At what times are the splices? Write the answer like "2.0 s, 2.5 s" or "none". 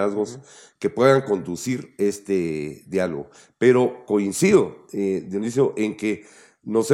none